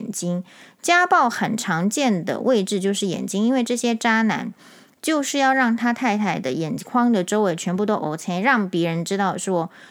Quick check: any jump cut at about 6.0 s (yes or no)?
no